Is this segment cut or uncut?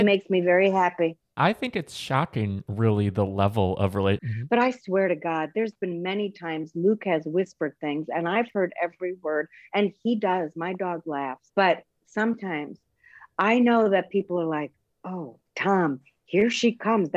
cut